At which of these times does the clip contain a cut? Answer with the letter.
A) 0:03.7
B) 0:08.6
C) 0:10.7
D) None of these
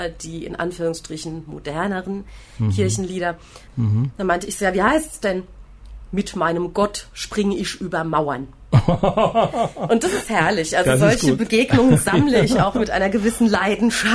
A